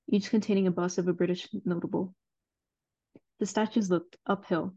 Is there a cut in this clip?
no; 0 cuts

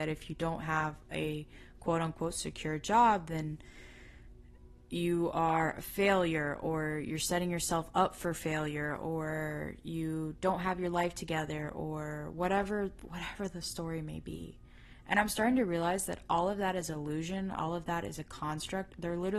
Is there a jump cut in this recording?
no; 0 cuts

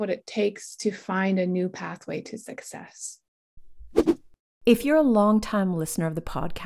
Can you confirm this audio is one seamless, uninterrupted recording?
yes; 0 cuts

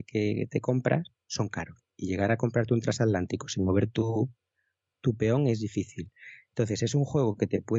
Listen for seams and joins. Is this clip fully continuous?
yes; 0 cuts

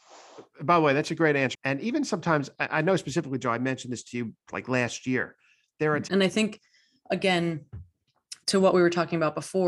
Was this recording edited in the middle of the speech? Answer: yes; 3 cuts; at 1.5 s, 6.1 s, 8.4 s

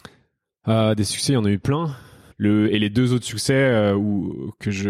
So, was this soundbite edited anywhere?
yes; 1 cut; at 2.3 s

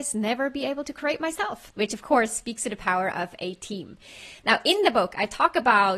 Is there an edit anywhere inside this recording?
no; 0 cuts

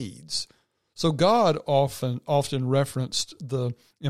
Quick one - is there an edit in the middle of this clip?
no; 0 cuts

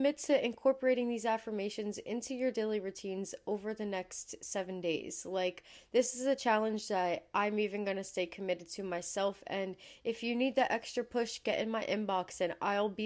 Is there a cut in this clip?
no; 0 cuts

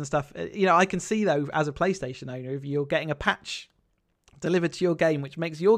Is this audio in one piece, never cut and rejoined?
yes; 0 cuts

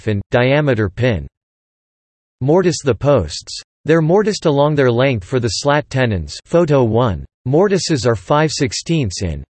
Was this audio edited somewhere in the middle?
yes; 2 cuts; at 3.7 s, 7.3 s

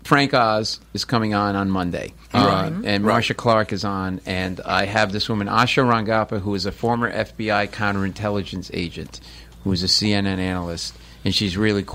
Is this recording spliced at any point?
yes; 1 cut; at 2.2 s

